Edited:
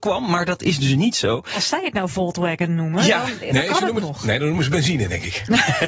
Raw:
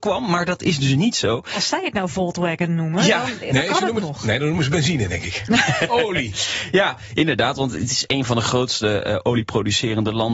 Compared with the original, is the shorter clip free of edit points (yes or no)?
yes